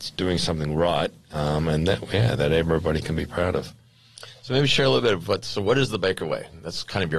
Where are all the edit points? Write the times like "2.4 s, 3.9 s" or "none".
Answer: none